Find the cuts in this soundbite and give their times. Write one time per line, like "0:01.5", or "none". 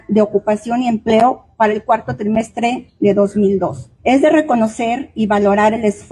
0:04.0